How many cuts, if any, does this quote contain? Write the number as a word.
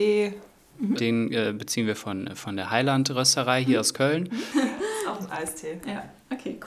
two